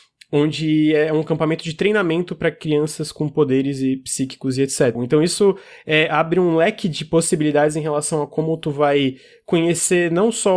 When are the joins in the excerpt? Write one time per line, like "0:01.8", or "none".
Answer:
0:05.0